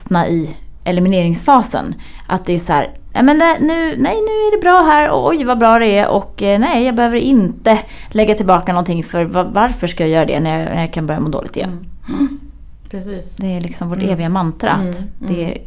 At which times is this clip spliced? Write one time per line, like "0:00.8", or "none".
none